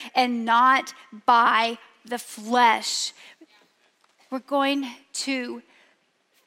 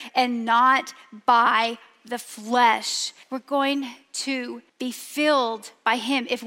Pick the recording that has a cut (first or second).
second